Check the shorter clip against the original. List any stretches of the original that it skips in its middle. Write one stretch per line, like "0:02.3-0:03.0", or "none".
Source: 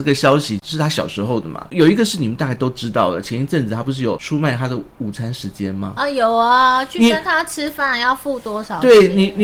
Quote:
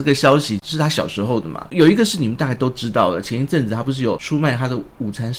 none